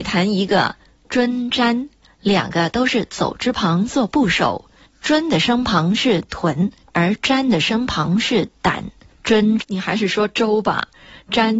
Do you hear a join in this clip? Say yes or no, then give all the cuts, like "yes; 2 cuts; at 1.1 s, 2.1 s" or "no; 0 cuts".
yes; 1 cut; at 9.6 s